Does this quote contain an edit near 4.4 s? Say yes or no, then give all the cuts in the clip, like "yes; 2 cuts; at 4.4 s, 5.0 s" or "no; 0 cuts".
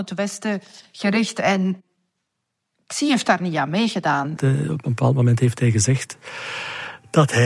yes; 1 cut; at 4.4 s